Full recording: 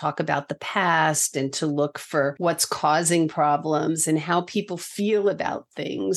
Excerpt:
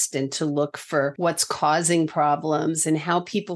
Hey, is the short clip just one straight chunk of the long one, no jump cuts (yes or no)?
yes